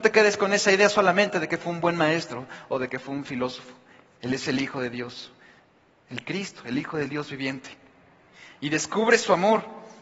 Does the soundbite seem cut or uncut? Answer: uncut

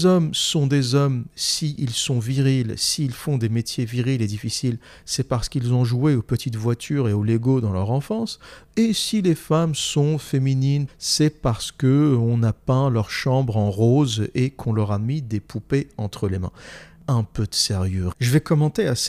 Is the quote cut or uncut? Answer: cut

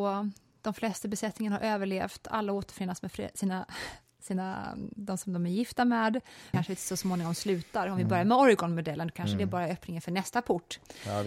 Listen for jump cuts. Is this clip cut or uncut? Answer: cut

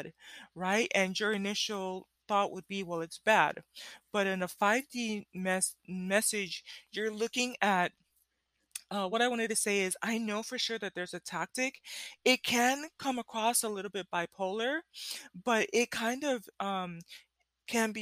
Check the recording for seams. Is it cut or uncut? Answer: uncut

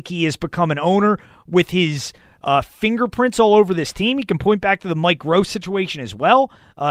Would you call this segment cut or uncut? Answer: uncut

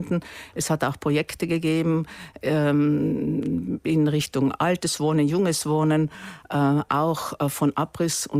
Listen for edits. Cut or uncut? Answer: uncut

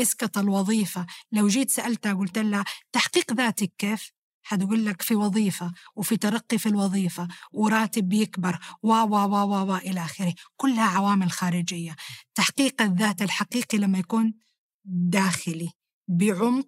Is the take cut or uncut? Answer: uncut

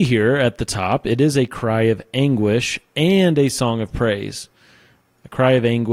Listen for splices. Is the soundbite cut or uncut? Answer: uncut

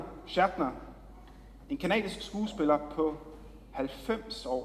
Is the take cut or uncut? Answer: uncut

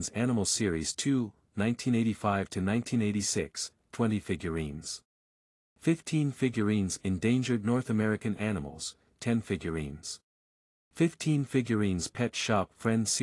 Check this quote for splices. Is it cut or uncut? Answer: cut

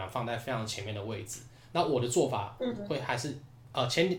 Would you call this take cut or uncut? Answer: uncut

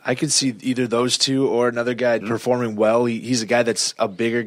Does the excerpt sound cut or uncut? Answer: cut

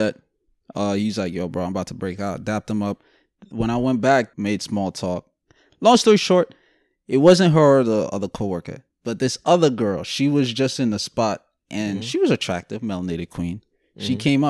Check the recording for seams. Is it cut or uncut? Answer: cut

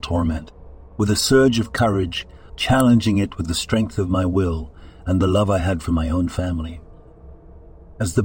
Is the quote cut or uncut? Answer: cut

